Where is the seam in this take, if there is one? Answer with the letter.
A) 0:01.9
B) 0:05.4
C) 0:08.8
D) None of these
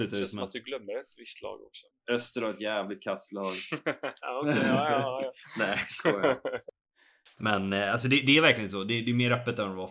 A